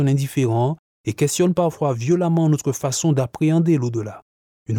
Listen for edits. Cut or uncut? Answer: uncut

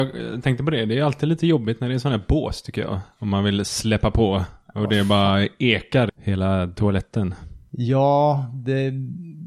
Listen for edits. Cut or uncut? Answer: cut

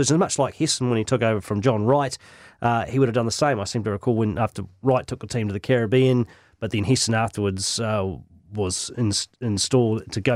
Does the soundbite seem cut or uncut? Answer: uncut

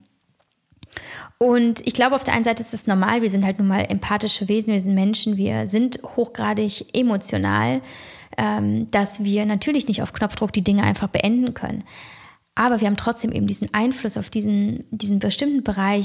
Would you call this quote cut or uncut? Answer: uncut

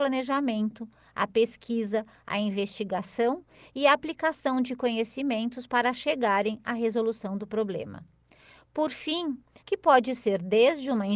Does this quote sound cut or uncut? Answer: cut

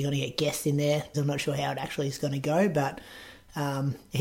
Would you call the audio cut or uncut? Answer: cut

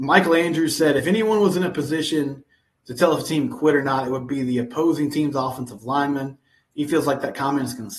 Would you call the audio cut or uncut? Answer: uncut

